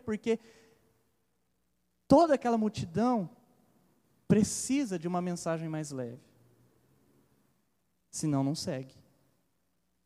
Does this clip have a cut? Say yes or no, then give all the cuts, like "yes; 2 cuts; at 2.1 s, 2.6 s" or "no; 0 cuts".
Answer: no; 0 cuts